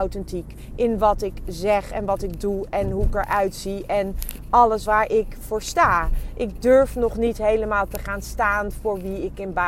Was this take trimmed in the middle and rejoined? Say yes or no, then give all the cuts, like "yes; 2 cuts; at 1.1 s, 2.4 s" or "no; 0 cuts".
yes; 1 cut; at 4.8 s